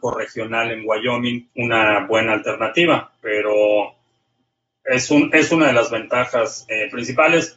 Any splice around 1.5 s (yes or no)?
yes